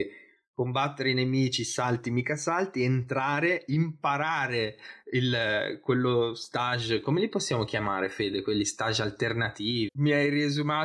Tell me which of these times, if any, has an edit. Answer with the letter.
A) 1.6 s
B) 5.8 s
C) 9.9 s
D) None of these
C